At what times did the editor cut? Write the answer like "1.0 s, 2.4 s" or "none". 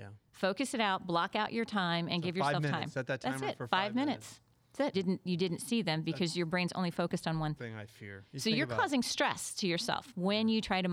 4.9 s, 7.6 s